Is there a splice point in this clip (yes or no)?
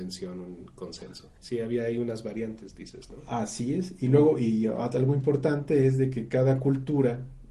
yes